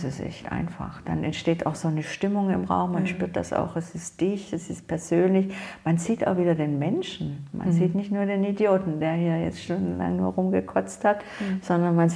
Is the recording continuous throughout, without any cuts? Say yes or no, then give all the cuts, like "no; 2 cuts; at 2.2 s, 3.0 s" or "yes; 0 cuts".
yes; 0 cuts